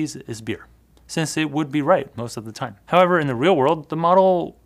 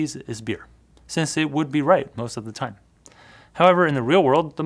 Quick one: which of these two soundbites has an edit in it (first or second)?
first